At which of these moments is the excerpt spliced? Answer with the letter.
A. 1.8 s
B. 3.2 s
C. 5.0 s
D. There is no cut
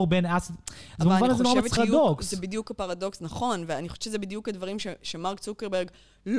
A